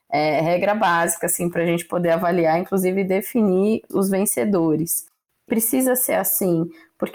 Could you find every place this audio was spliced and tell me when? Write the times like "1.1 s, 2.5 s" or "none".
3.9 s